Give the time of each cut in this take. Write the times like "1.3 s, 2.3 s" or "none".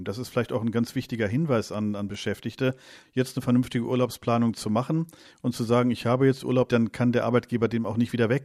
6.7 s